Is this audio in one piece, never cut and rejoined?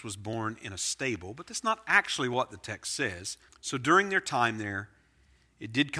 no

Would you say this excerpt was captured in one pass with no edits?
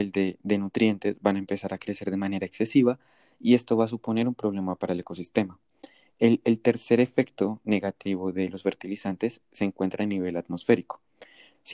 no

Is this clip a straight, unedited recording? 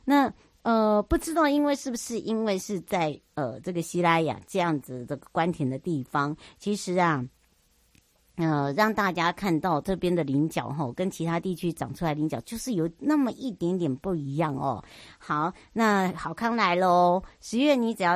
yes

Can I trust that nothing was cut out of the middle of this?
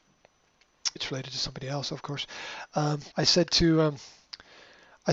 no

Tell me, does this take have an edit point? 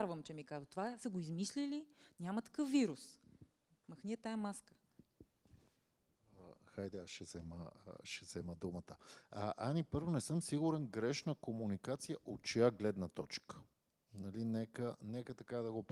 no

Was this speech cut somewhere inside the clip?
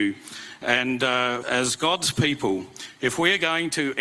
yes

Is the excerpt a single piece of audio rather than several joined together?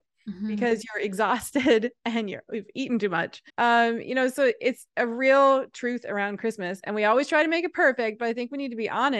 no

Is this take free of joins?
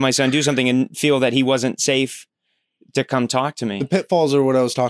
yes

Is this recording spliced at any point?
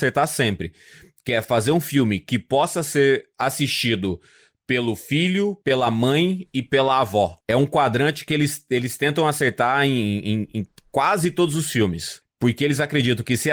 yes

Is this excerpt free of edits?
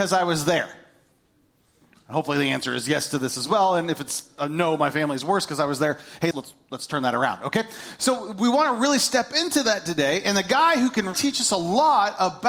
no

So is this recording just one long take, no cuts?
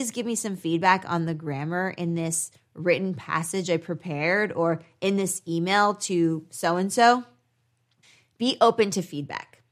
yes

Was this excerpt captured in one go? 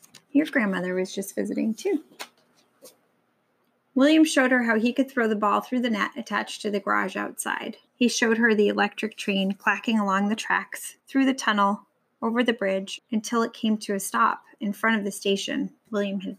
no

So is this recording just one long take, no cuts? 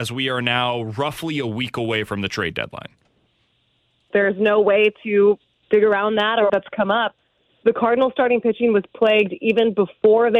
no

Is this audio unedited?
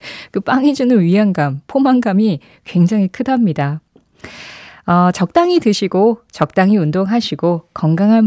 yes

